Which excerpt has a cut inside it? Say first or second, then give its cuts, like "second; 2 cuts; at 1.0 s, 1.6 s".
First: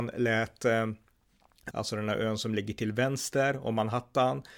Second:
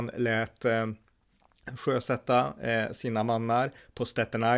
first; 1 cut; at 1.7 s